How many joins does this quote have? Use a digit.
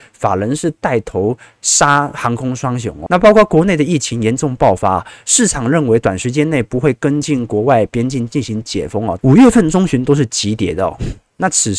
2